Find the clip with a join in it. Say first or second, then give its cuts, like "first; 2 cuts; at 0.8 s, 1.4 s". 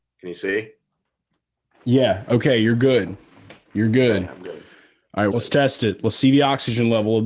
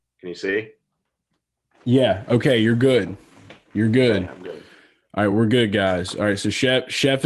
first; 1 cut; at 5.3 s